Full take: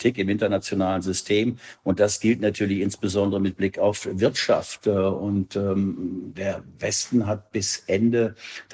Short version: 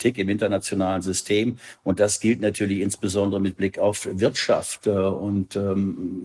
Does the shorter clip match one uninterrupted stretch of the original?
yes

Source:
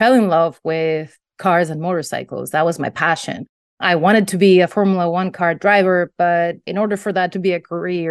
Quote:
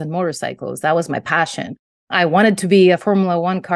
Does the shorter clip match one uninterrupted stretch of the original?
yes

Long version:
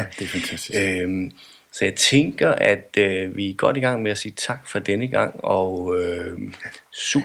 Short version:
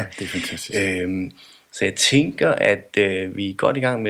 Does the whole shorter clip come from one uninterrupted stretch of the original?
yes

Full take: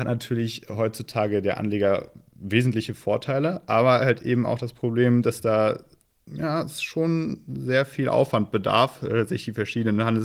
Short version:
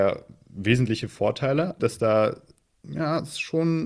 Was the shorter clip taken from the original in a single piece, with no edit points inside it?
no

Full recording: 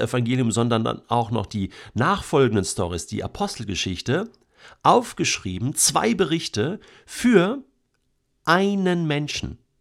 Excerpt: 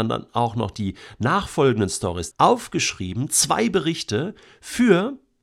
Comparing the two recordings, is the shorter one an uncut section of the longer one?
no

